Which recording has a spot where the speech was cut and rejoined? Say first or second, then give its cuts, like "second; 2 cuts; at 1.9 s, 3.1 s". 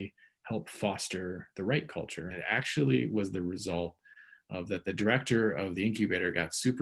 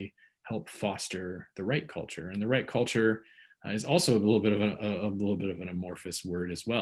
first; 1 cut; at 2.3 s